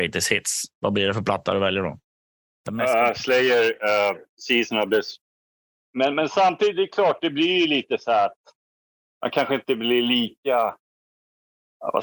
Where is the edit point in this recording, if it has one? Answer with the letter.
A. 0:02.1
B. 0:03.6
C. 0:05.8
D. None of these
C